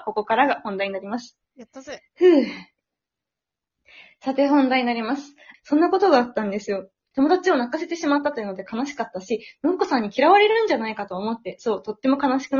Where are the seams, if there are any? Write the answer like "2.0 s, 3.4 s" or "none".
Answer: 5.5 s, 7.1 s